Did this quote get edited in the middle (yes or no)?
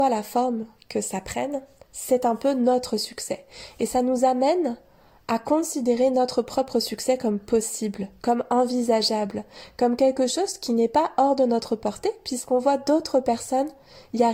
no